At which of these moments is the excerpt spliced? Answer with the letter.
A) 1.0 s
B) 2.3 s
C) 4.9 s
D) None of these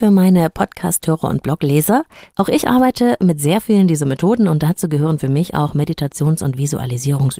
B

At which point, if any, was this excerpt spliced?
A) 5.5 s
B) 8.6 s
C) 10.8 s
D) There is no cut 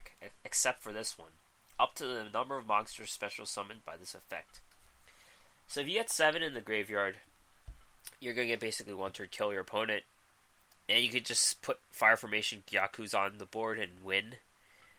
D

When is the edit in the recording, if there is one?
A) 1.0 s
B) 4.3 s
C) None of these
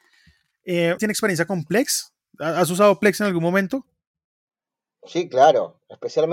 A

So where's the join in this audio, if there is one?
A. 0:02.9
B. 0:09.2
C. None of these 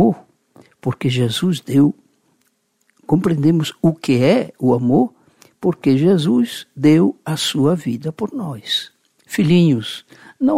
B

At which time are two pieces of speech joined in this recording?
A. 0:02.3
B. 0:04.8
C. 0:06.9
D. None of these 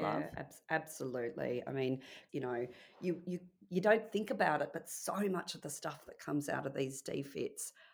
A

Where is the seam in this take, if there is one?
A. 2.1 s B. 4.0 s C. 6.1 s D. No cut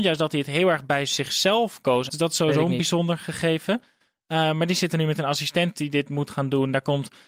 A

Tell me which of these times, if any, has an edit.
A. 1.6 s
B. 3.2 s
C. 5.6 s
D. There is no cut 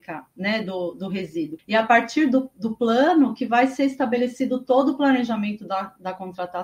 A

